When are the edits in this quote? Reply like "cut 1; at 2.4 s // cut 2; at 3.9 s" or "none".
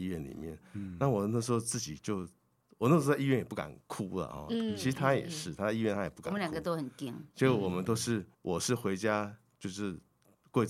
cut 1; at 8.3 s